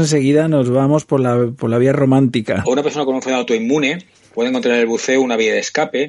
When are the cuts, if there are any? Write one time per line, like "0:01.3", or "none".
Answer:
0:02.6